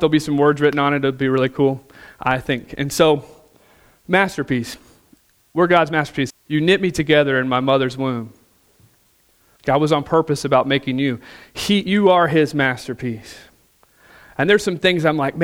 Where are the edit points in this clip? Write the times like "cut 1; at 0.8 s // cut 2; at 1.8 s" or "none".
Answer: cut 1; at 6.3 s // cut 2; at 9.6 s